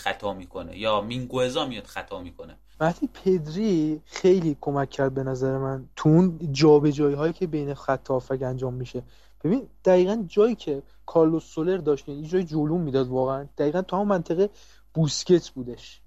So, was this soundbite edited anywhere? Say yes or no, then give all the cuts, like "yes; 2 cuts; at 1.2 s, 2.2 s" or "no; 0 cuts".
no; 0 cuts